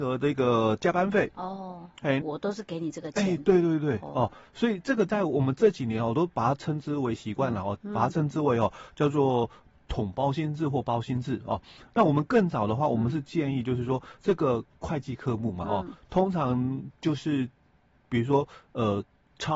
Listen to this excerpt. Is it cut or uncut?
cut